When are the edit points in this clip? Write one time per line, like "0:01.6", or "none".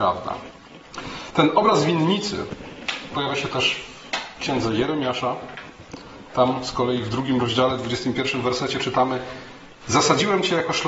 none